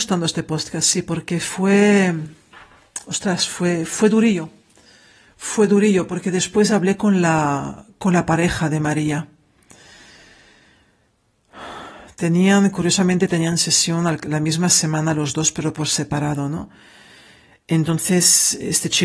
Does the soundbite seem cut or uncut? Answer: uncut